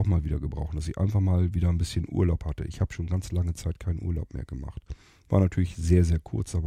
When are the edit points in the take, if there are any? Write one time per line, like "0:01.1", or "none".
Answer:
none